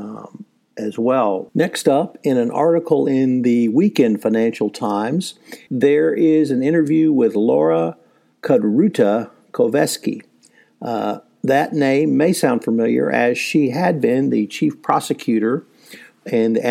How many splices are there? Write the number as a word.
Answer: two